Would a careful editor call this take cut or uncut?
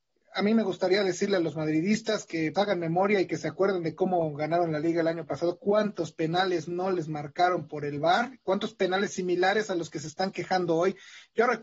cut